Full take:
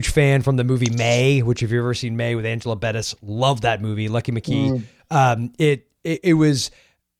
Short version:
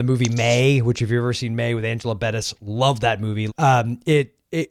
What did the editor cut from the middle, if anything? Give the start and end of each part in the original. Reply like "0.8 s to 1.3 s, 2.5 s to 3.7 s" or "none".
4.1 s to 5.0 s

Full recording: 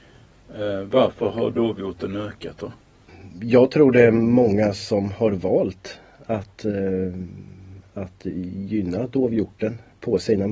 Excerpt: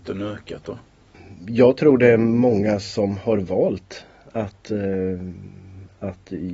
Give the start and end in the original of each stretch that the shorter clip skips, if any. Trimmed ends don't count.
none

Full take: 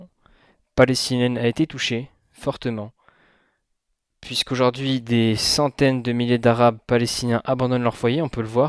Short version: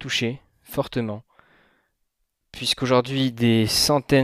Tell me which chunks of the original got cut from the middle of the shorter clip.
none

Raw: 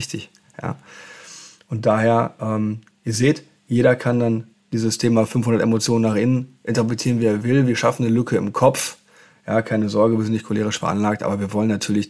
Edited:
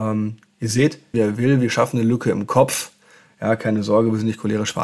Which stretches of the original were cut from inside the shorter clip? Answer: 3.6 s to 7.2 s

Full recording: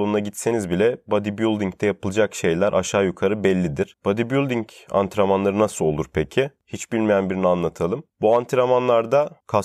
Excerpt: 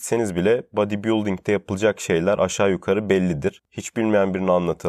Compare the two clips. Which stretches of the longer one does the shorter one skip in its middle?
4.0 s to 6.6 s

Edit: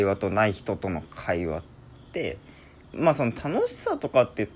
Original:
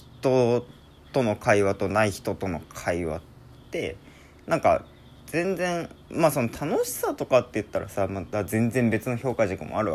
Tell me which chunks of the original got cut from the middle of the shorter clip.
4.4 s to 6.0 s

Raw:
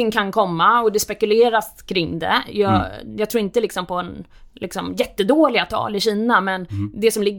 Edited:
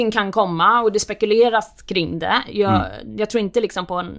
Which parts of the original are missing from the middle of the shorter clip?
none

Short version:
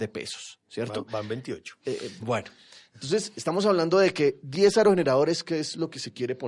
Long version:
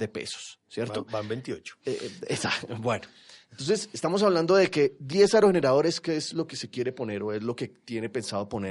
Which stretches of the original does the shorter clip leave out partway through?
2.2 s to 2.8 s

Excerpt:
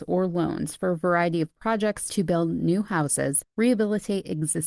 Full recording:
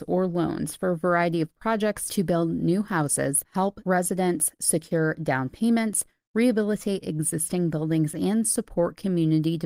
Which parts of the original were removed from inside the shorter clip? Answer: 3.4 s to 6.2 s

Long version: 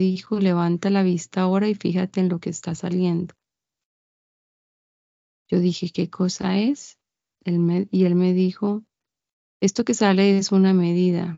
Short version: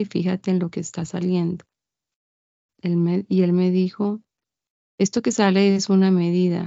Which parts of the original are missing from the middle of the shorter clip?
4.4 s to 7.3 s

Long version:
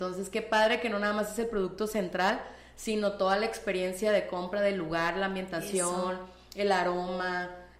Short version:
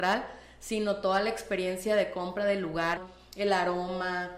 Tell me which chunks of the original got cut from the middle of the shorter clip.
5.1 s to 6.2 s

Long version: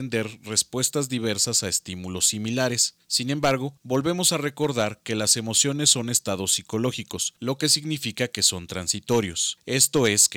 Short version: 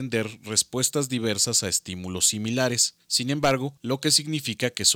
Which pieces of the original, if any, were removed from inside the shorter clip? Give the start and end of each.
3.8 s to 7.4 s

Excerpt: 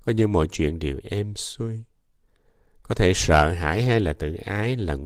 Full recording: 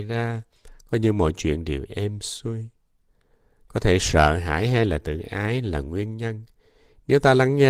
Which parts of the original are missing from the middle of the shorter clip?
none

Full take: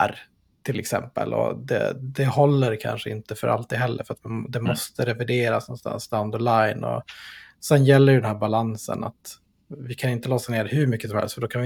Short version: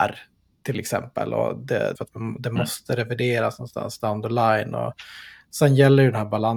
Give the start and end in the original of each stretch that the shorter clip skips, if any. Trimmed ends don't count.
1.9 s to 4.0 s

